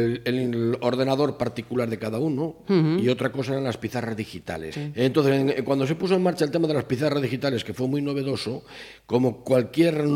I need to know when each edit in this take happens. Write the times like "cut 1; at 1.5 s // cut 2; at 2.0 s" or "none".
cut 1; at 4.7 s